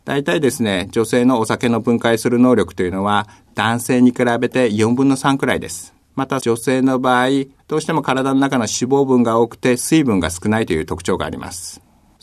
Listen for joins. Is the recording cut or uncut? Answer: cut